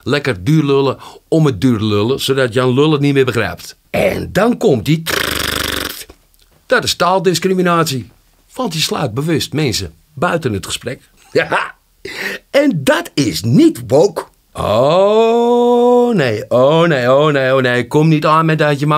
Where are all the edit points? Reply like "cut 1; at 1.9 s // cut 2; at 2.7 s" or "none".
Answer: cut 1; at 3.9 s